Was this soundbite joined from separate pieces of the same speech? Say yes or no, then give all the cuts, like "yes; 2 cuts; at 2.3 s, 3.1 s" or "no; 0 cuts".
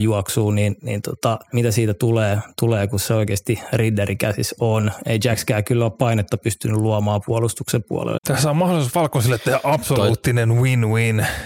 yes; 2 cuts; at 1.5 s, 8.2 s